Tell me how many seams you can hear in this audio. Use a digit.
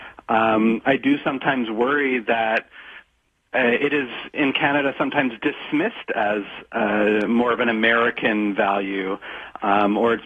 0